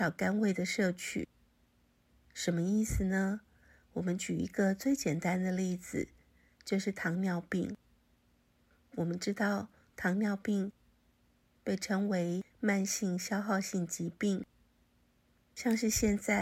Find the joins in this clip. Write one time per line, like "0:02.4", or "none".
0:15.4